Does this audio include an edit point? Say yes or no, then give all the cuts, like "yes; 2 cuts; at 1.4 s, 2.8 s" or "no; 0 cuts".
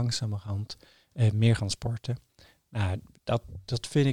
no; 0 cuts